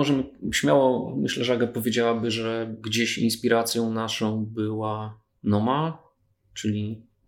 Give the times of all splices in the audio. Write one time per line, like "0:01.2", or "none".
none